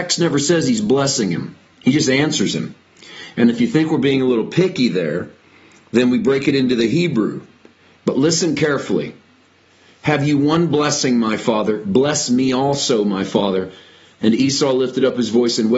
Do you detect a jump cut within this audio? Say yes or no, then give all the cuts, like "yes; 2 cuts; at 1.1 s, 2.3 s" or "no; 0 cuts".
yes; 1 cut; at 8.0 s